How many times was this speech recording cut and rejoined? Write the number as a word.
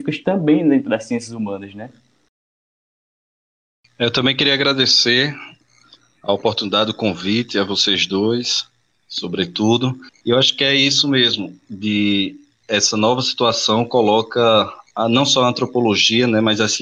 one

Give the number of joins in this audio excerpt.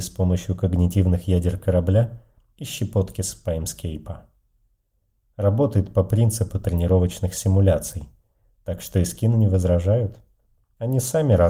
zero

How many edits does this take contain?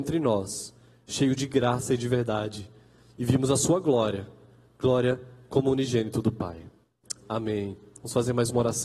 zero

